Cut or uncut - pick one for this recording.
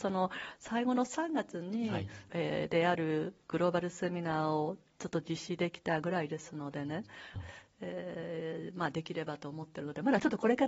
cut